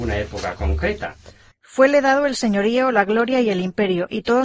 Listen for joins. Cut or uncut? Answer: cut